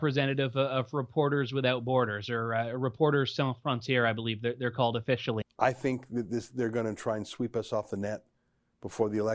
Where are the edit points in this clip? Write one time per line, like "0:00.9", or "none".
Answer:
0:05.4